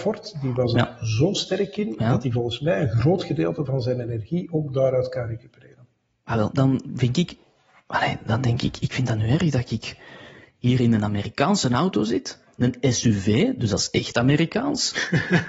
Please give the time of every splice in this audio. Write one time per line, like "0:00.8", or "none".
0:06.5

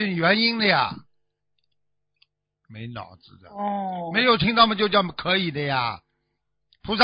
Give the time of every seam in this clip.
0:02.6

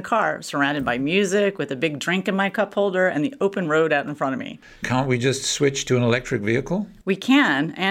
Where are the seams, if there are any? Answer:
0:04.8

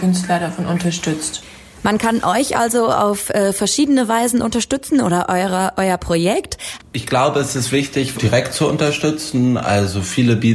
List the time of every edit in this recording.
0:06.8
0:08.1

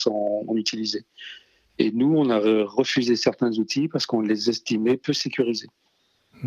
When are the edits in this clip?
none

